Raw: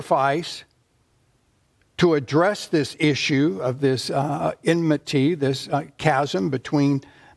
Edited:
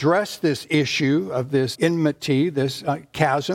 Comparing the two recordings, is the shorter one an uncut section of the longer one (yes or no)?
no